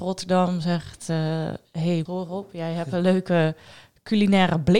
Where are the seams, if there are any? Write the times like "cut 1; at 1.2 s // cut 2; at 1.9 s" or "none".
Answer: cut 1; at 2.1 s